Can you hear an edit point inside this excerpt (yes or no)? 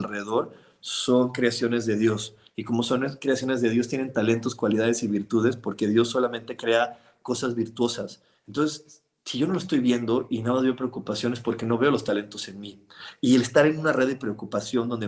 no